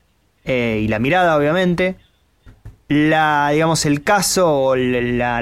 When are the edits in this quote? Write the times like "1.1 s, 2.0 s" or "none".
none